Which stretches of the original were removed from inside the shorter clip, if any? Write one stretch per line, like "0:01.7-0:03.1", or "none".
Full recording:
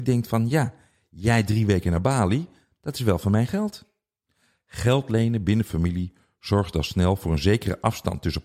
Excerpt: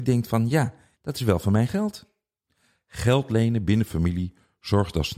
0:00.9-0:02.7